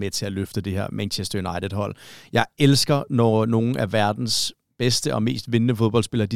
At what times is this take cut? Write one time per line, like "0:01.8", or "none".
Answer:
none